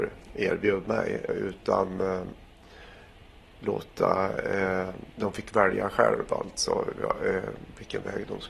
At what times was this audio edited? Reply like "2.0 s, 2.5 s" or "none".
1.3 s, 5.1 s